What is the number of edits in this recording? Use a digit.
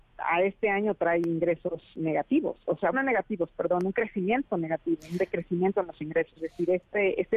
2